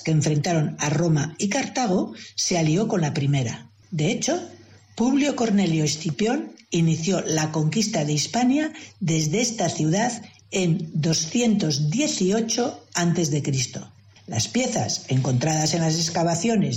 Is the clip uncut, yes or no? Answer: no